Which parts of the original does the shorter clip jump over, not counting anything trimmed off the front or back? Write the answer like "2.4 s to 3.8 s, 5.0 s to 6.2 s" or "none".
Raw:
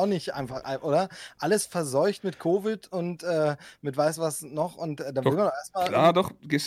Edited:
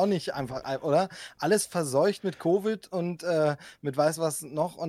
none

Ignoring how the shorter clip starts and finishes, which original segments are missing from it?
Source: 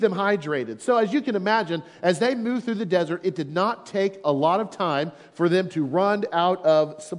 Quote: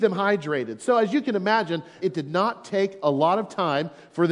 2.0 s to 3.2 s

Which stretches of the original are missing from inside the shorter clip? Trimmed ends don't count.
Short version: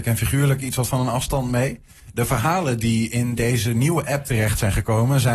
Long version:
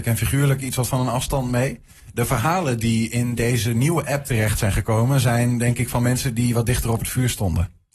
none

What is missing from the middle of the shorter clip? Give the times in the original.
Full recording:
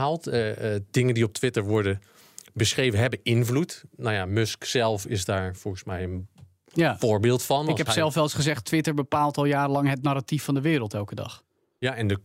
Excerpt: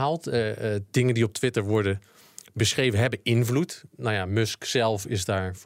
none

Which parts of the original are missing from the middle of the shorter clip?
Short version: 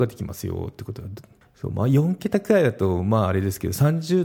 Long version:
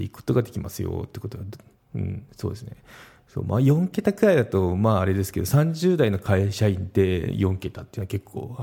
1.8 s to 3.1 s

